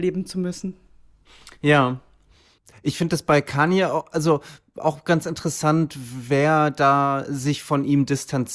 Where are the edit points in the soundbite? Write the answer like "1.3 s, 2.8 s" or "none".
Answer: none